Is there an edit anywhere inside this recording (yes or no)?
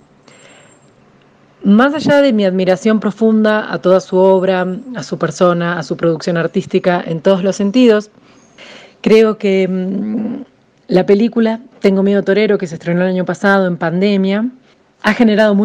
no